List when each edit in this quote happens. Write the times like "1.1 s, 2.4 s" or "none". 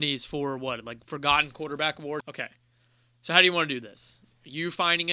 2.2 s